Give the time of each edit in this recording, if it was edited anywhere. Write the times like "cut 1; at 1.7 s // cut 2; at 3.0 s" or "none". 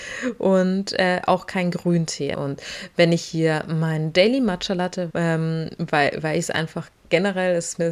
cut 1; at 2.3 s // cut 2; at 5.1 s